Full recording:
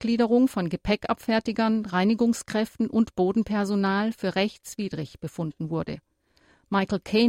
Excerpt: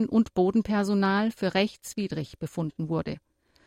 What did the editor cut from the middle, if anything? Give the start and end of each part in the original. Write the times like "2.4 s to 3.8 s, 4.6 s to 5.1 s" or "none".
none

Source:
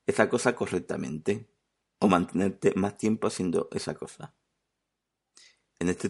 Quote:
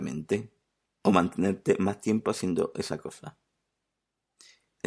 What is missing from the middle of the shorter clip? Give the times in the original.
none

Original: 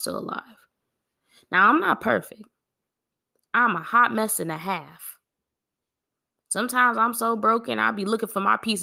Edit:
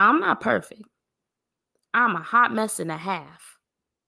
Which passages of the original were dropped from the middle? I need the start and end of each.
none

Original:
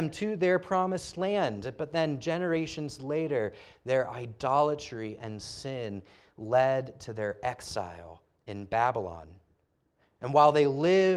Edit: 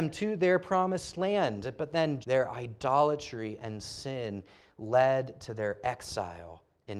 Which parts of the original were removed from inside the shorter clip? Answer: 2.2 s to 3.8 s

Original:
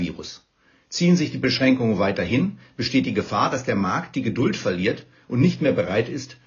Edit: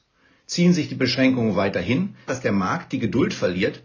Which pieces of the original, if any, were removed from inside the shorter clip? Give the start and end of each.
2.7 s to 3.5 s

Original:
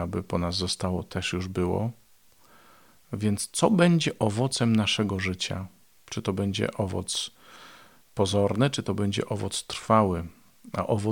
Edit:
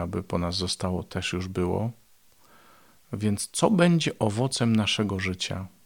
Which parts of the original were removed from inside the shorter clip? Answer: none

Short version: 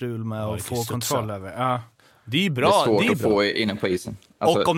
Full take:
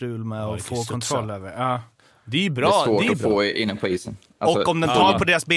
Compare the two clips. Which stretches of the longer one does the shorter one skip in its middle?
none

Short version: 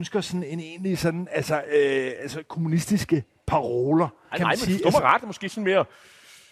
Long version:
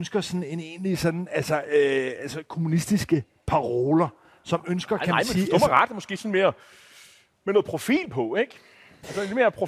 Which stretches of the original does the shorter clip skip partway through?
4.3 s to 5.0 s

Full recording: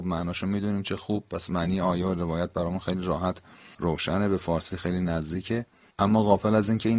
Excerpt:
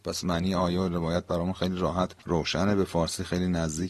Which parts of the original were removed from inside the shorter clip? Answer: 3.5 s to 3.7 s

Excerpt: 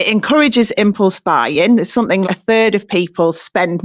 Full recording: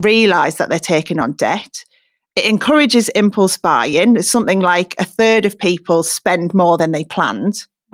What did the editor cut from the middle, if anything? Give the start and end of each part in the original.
4.6 s to 4.9 s

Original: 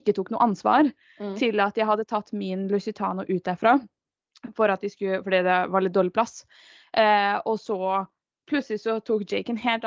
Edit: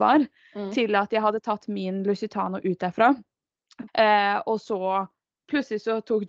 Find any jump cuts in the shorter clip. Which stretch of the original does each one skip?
4.5 s to 6.9 s

